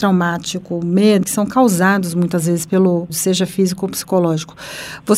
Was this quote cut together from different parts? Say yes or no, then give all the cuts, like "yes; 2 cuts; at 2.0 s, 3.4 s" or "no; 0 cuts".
yes; 2 cuts; at 1.2 s, 3.1 s